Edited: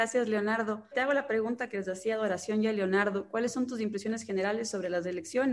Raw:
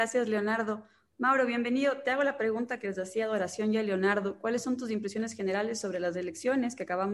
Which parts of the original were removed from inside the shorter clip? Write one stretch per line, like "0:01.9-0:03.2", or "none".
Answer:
0:00.9-0:02.0

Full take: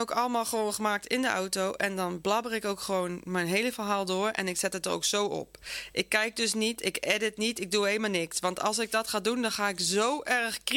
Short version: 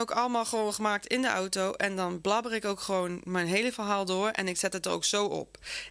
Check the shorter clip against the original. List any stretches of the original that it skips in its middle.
none

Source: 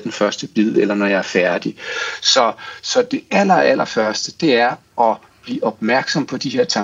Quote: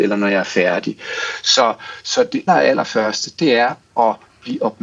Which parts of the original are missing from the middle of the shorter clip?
0:03.3-0:03.5

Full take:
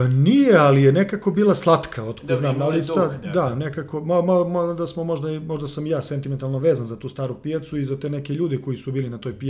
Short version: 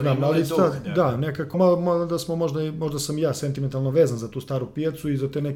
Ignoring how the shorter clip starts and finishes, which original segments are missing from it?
0:03.9-0:04.2

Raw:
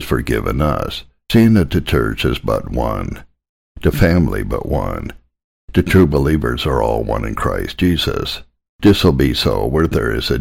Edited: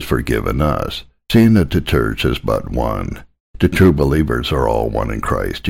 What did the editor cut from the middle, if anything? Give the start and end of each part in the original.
0:03.4-0:05.5

